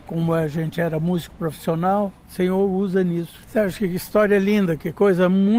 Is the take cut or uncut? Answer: cut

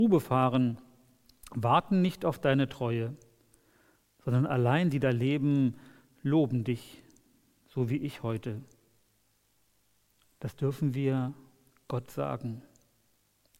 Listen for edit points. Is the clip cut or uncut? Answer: uncut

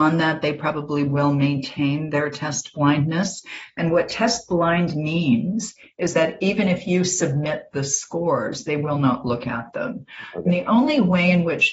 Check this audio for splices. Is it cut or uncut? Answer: uncut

